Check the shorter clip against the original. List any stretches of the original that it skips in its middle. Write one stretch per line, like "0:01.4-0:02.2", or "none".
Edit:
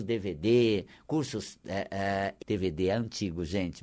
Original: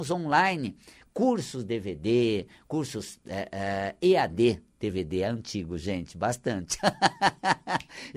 0:04.0-0:04.7